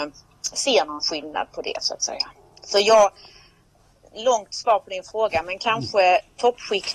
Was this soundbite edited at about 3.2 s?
no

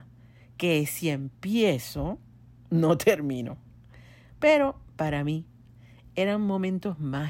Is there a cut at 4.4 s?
no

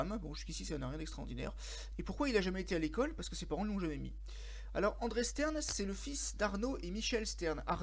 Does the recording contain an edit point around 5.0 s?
no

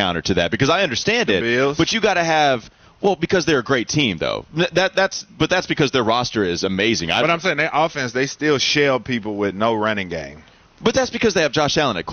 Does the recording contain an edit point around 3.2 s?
no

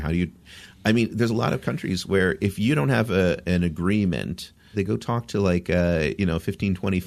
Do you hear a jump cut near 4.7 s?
yes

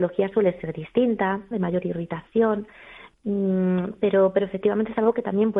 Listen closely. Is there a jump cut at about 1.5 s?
yes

